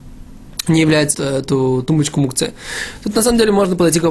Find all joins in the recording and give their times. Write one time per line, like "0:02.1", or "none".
0:01.1

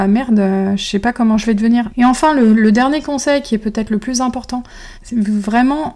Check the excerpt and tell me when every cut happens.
0:01.9
0:05.0

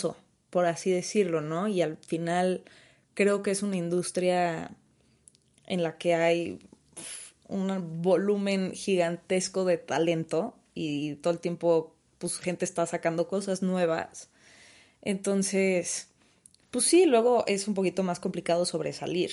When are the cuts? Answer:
none

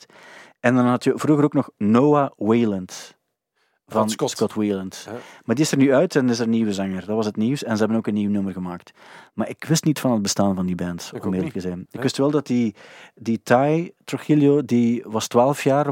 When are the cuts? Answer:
none

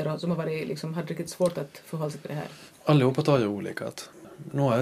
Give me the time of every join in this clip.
0:02.7

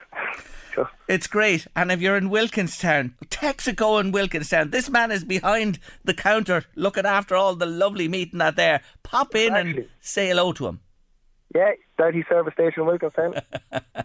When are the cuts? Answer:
0:03.2

